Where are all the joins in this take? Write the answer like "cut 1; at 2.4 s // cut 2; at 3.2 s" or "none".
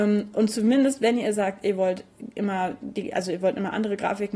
none